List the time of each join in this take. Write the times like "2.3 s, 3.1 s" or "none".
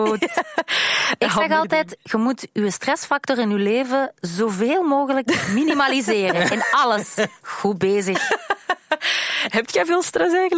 none